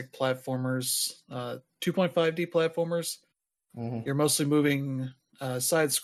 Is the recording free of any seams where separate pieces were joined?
yes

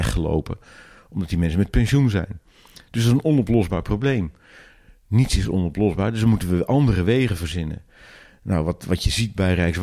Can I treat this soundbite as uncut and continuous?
yes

